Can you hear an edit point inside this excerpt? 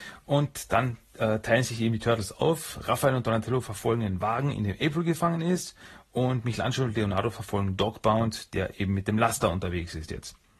no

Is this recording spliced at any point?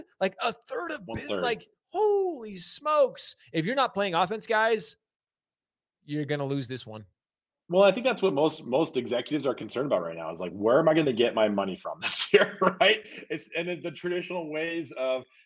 no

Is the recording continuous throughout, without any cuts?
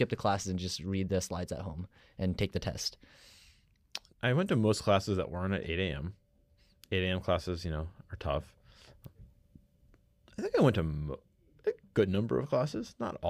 no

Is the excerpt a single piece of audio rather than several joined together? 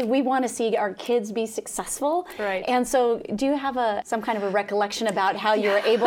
no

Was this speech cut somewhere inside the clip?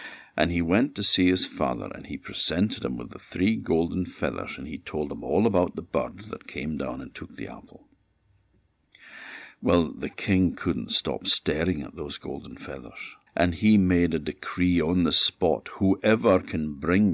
yes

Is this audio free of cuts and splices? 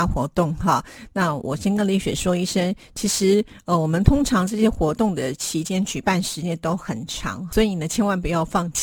yes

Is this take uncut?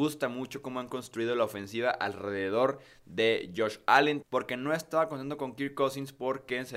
no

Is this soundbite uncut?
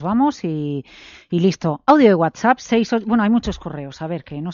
yes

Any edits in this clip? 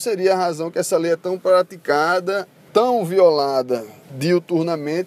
no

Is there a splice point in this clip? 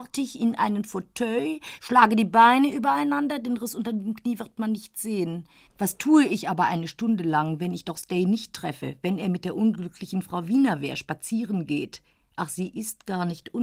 yes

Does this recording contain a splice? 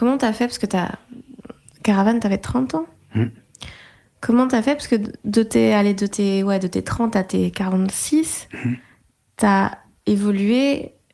no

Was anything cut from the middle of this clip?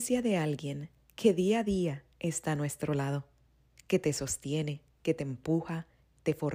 no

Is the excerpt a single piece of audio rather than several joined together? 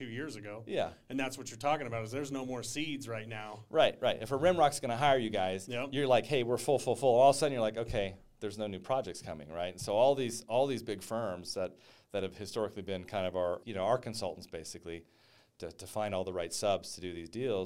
no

